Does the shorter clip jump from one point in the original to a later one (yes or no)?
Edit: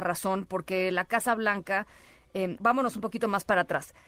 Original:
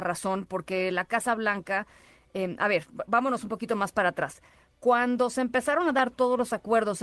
yes